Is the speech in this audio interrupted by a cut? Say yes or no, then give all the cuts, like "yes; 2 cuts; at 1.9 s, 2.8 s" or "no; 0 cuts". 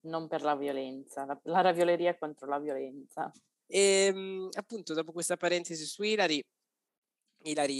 yes; 1 cut; at 3.6 s